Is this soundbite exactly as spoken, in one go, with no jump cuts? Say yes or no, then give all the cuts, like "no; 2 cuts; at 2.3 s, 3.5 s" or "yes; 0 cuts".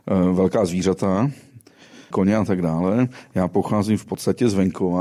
no; 1 cut; at 2.1 s